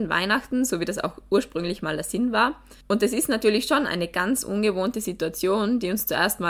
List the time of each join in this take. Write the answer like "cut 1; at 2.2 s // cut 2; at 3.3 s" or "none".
cut 1; at 2.8 s